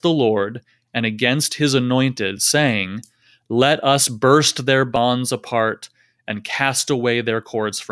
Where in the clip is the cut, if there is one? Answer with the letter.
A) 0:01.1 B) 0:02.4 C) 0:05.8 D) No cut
D